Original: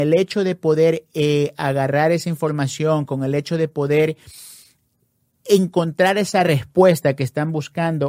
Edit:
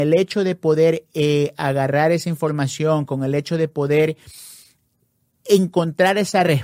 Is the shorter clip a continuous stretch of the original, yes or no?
yes